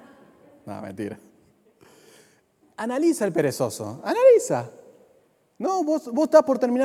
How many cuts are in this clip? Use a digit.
0